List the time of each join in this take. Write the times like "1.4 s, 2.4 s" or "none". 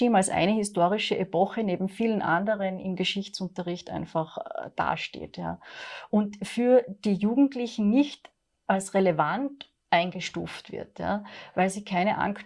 none